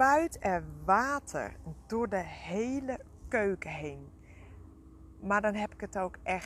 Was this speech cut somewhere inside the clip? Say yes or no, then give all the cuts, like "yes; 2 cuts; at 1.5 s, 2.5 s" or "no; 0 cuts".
no; 0 cuts